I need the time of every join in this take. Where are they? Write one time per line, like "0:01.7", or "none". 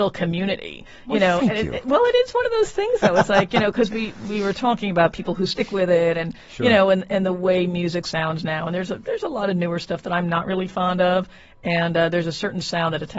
none